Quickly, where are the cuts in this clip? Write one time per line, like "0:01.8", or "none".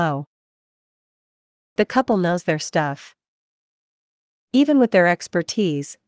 0:04.5